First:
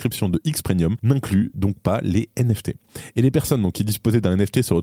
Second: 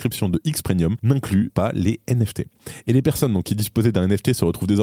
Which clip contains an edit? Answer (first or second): second